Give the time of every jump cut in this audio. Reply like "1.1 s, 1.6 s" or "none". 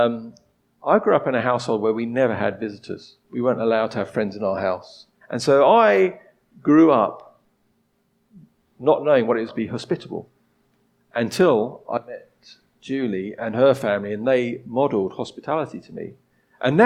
5.2 s, 9.5 s